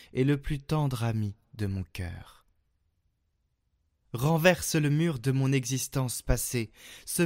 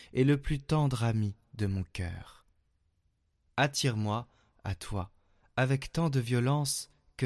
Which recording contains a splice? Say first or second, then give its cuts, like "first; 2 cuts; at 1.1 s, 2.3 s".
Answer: second; 1 cut; at 3.5 s